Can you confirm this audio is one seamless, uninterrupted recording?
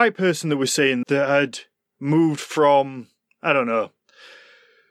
no; 1 cut; at 1.0 s

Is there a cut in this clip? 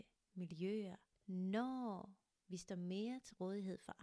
no; 0 cuts

